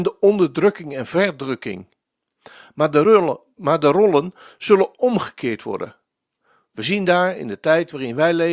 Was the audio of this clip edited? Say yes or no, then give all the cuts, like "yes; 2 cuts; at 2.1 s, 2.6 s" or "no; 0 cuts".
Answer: no; 0 cuts